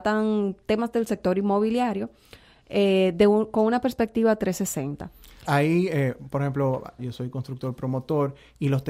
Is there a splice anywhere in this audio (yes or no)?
yes